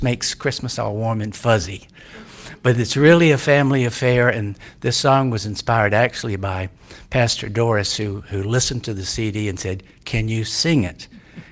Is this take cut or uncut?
uncut